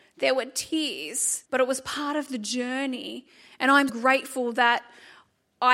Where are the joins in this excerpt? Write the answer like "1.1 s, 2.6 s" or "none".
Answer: 1.5 s, 3.9 s